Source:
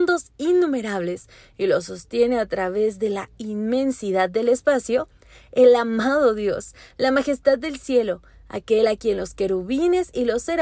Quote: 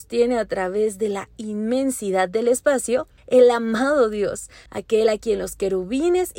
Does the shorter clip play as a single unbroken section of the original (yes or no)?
no